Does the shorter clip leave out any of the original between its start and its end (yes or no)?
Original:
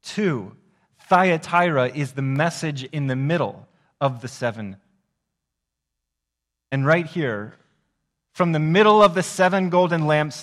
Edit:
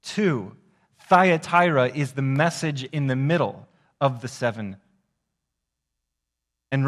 no